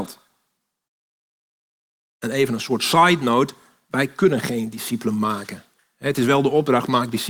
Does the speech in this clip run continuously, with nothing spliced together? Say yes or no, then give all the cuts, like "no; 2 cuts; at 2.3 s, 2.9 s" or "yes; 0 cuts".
yes; 0 cuts